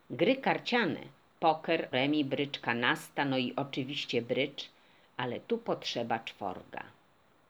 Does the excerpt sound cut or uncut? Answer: cut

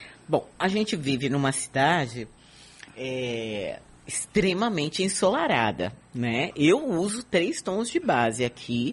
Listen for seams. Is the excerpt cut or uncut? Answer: uncut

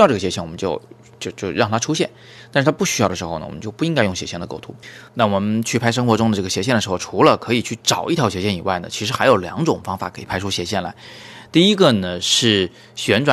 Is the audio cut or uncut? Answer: cut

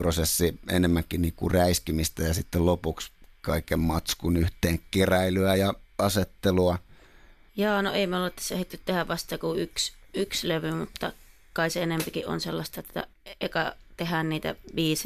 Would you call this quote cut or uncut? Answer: uncut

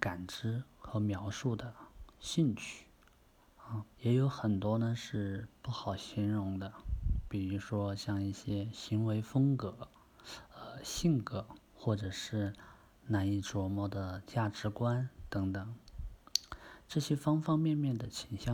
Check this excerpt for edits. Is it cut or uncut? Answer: cut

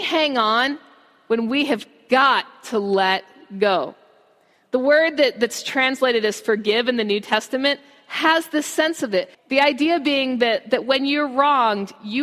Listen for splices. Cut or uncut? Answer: cut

